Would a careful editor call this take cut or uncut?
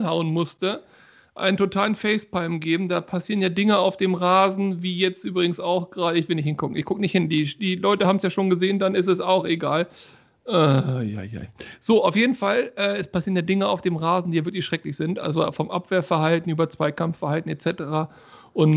uncut